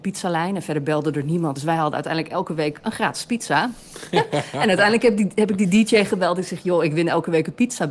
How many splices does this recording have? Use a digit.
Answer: 0